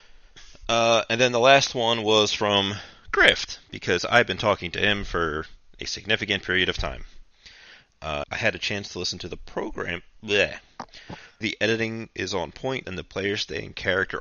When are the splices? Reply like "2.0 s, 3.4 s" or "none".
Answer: 8.2 s, 11.4 s, 12.8 s